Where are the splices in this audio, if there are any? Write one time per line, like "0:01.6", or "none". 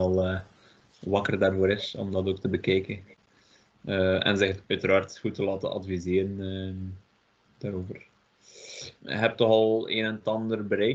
0:09.0